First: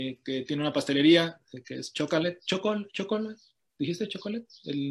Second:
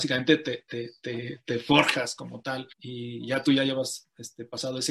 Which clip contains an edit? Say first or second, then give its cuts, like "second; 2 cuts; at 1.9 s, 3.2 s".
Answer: second; 1 cut; at 2.7 s